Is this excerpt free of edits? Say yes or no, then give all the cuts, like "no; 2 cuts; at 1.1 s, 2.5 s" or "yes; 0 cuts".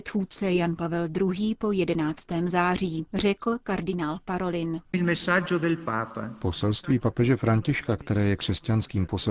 yes; 0 cuts